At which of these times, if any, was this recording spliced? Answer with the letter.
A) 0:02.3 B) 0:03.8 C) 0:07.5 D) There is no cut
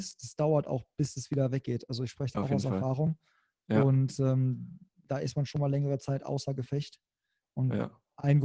A